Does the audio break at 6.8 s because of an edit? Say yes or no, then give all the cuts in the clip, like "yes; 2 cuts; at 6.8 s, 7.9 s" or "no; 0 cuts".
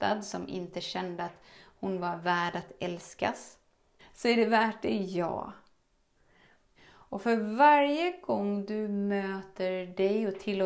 yes; 2 cuts; at 4.0 s, 6.8 s